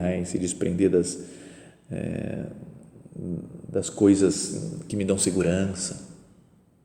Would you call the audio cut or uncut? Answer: uncut